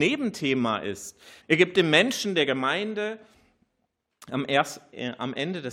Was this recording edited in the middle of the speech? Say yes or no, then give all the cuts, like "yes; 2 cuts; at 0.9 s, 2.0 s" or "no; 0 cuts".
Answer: yes; 1 cut; at 1.4 s